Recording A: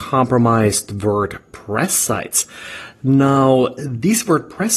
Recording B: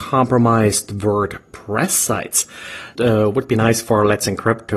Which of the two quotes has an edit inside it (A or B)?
B